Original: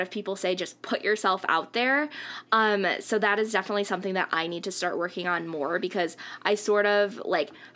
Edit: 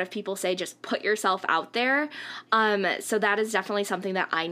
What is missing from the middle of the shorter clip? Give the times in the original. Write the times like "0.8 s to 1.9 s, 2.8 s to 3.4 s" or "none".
none

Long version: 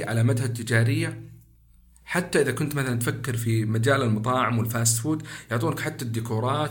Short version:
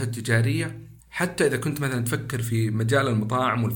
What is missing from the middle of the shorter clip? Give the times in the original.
1.4 s to 1.9 s

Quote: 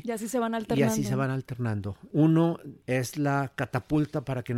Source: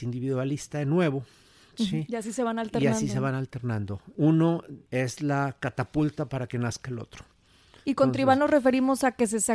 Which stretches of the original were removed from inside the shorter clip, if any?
none

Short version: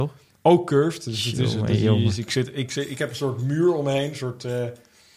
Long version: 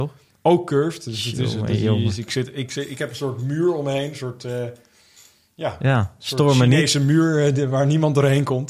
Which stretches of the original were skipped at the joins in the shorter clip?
none

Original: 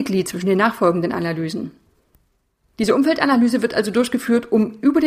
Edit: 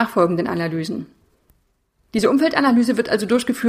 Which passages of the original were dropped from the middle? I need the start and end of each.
none

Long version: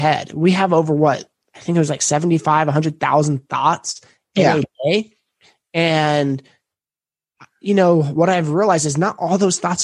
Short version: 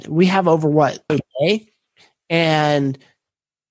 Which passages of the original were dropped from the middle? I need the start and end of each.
1.4 s to 4.5 s

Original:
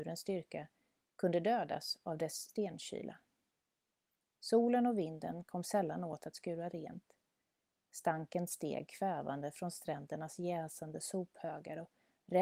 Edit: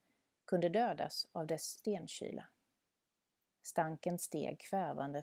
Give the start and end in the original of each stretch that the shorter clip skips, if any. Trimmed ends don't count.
4.1 s to 7.7 s

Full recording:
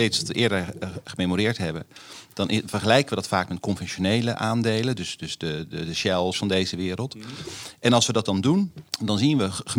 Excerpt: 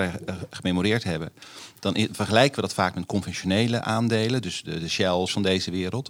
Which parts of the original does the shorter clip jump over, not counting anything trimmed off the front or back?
5.2 s to 5.7 s

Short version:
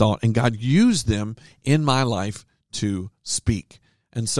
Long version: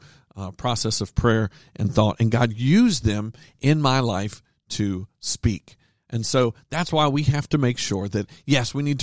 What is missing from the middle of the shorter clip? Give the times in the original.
none

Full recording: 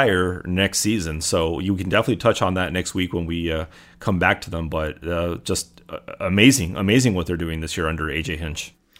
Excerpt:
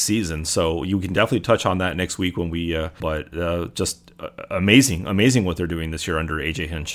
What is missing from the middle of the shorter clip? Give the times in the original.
3.8 s to 4.7 s

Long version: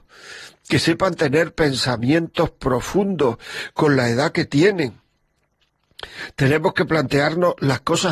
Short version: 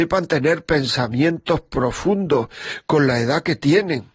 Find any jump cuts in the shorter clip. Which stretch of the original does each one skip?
none

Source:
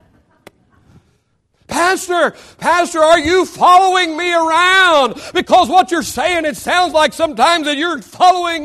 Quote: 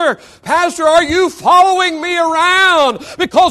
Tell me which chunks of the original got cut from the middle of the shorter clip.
none

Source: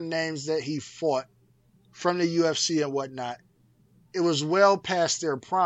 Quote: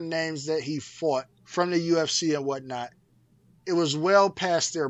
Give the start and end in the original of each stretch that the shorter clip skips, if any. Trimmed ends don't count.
1.3 s to 1.8 s

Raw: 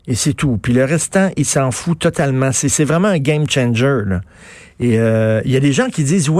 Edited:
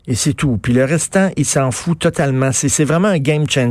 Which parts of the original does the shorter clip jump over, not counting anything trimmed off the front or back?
none

